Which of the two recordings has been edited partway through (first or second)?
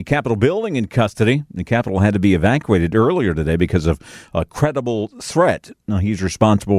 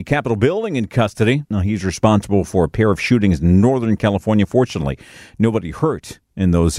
second